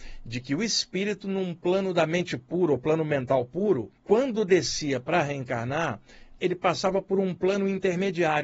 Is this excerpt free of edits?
no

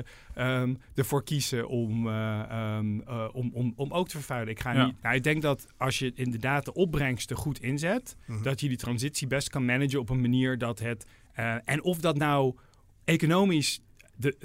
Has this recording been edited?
yes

